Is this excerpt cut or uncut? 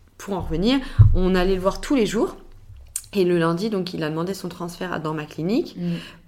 uncut